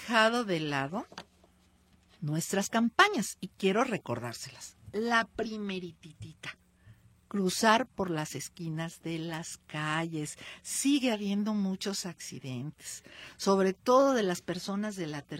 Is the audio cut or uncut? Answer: uncut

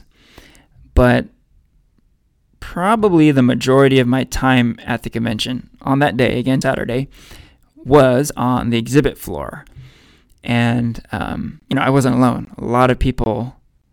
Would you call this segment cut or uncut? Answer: cut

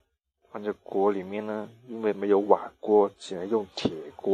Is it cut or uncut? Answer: uncut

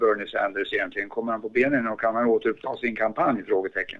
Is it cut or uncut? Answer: uncut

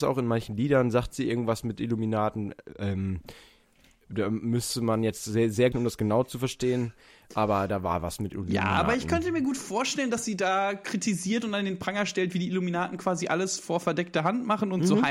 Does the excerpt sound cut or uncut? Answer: cut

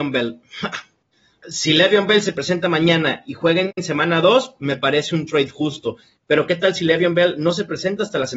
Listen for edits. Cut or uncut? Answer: cut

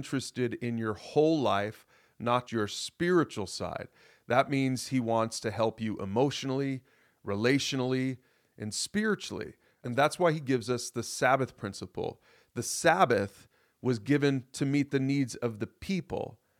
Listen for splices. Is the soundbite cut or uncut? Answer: cut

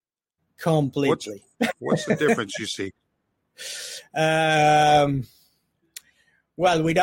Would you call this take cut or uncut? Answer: uncut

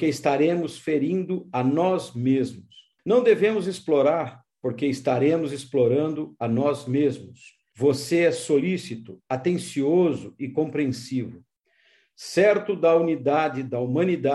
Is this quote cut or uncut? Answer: cut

